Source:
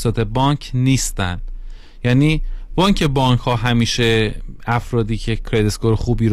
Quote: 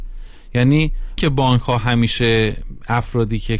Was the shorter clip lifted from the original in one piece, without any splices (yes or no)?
no